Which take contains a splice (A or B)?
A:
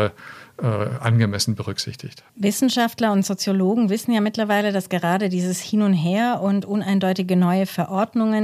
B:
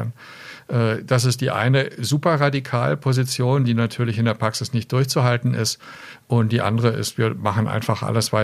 A